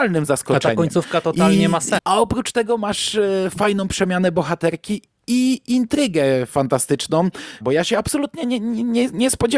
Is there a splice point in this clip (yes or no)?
yes